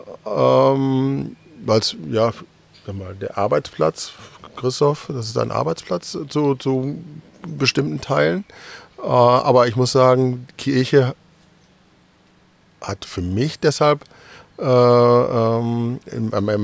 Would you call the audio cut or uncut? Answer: uncut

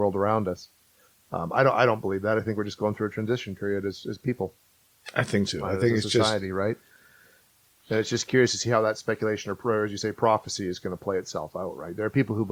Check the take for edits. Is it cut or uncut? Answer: cut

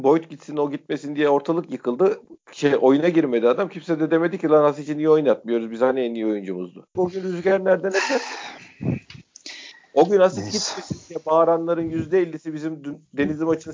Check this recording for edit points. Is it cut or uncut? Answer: cut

